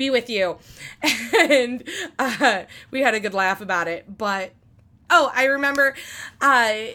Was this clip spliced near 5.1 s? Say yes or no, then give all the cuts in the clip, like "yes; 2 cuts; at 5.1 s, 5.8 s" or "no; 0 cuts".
yes; 1 cut; at 5.1 s